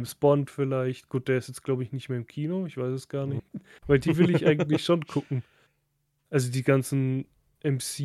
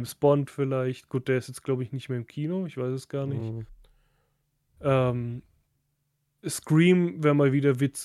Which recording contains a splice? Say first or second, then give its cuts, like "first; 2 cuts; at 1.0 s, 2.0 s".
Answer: first; 1 cut; at 3.4 s